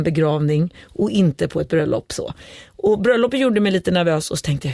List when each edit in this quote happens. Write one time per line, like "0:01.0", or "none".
none